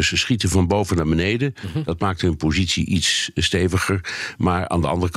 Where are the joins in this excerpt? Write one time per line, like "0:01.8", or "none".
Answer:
none